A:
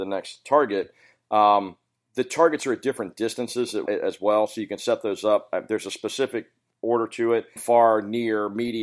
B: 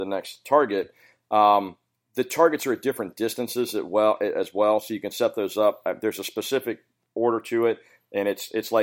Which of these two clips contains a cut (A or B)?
A